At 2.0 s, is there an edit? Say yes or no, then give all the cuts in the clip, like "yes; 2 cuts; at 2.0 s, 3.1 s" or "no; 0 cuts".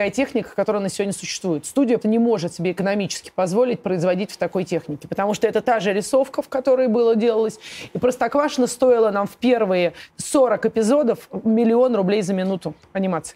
yes; 2 cuts; at 2.0 s, 10.1 s